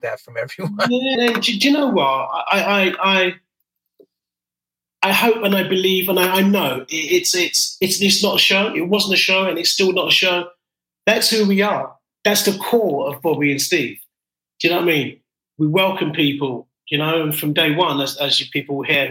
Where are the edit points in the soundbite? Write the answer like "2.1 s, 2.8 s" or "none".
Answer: 1.2 s